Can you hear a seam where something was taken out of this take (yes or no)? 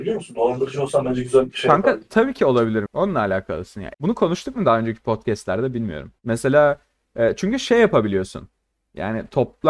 yes